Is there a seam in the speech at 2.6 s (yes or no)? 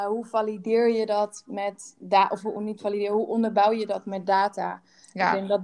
no